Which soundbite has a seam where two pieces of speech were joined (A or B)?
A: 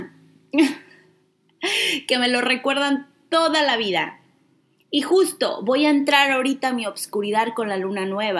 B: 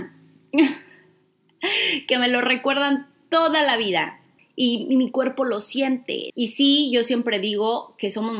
B